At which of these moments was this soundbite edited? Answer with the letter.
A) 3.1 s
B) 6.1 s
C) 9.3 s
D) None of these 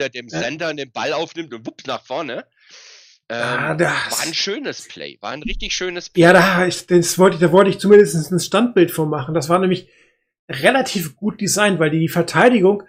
D